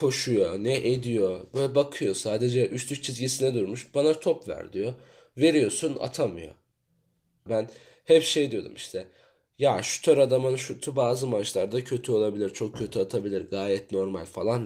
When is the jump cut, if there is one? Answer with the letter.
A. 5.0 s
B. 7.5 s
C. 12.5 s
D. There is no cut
B